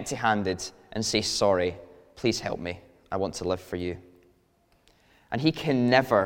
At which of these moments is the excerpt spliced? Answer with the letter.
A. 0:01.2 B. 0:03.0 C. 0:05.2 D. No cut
D